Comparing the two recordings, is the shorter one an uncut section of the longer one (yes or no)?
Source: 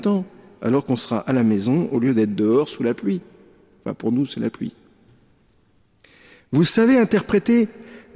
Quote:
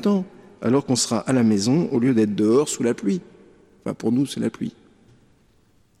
yes